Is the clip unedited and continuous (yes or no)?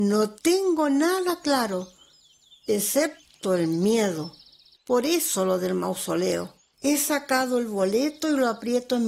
no